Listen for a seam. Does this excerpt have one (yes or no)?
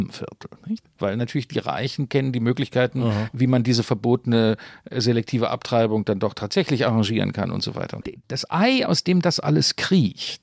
no